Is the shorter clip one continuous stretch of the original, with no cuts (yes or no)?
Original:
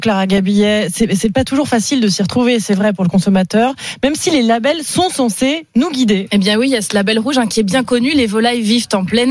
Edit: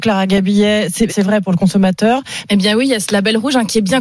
no